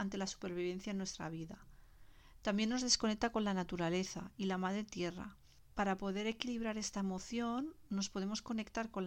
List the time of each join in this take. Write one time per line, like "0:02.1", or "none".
none